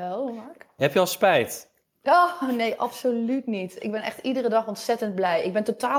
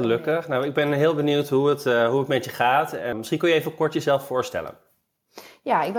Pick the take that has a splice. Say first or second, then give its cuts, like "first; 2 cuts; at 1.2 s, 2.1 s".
second; 1 cut; at 3.1 s